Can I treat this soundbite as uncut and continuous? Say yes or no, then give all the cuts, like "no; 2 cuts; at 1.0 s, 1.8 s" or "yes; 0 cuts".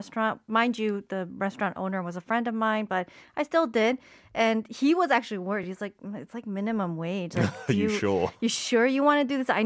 yes; 0 cuts